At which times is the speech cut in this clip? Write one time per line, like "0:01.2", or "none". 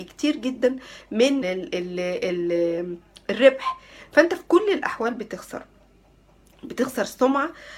0:01.4